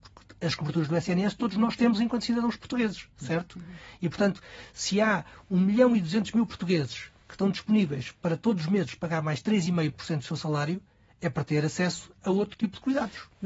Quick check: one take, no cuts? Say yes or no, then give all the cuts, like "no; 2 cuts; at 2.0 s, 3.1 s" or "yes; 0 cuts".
yes; 0 cuts